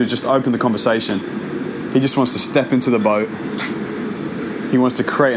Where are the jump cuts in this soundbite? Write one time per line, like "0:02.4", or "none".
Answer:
none